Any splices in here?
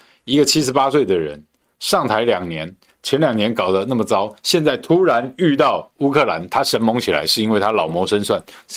no; 0 cuts

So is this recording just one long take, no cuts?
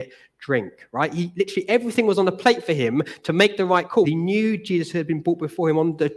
no; 1 cut; at 4.0 s

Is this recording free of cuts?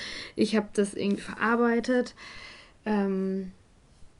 yes; 0 cuts

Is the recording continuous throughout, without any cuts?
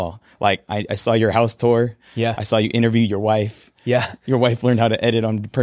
yes; 0 cuts

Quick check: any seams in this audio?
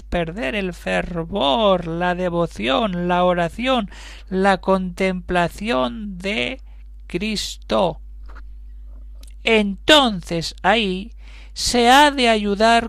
no; 0 cuts

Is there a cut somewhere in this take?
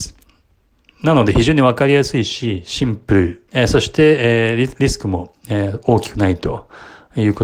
yes; 1 cut; at 3.5 s

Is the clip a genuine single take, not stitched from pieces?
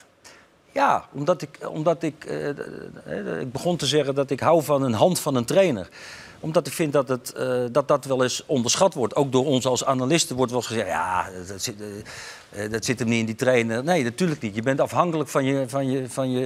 yes; 0 cuts

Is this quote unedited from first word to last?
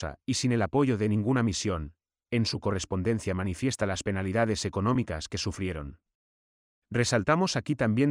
yes; 0 cuts

